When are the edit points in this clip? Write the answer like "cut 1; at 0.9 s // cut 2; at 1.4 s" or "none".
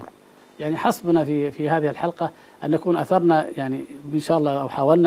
cut 1; at 1.5 s